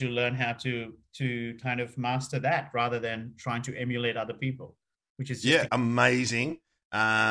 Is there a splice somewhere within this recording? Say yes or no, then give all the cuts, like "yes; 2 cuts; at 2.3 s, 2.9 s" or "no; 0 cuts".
yes; 1 cut; at 5.7 s